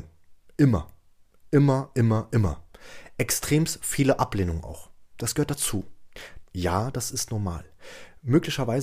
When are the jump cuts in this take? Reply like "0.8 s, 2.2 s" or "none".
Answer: 6.4 s